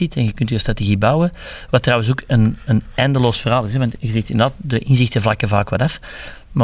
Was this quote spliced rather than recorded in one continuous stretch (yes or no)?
no